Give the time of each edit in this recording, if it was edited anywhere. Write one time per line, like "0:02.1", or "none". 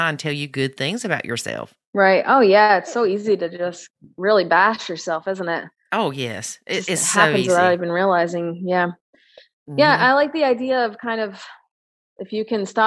none